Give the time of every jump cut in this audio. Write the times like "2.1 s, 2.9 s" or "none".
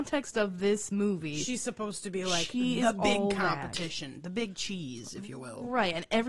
none